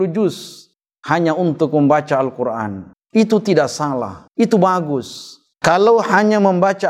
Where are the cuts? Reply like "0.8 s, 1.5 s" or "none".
5.5 s